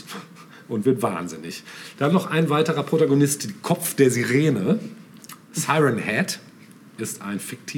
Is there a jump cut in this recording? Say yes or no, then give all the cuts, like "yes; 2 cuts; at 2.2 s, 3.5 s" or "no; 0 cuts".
yes; 1 cut; at 2.0 s